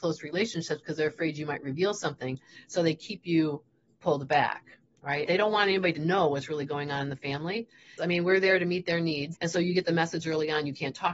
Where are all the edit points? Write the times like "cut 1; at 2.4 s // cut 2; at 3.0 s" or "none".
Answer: cut 1; at 5.3 s // cut 2; at 8.0 s // cut 3; at 9.3 s